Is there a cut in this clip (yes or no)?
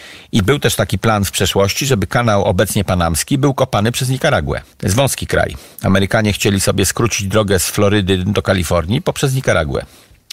yes